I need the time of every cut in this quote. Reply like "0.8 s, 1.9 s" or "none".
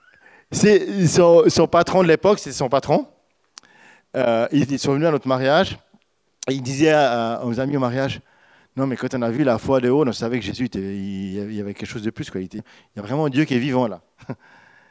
12.6 s